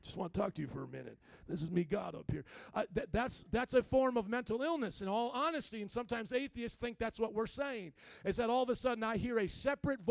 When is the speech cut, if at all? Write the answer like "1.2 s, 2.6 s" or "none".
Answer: none